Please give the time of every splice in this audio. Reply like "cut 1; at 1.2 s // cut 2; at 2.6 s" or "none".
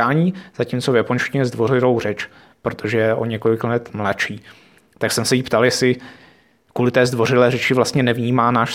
none